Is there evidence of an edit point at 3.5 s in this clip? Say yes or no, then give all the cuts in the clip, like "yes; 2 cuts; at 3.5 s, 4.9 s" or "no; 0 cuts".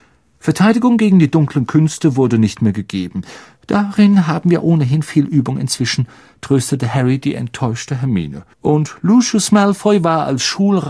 no; 1 cut; at 8.5 s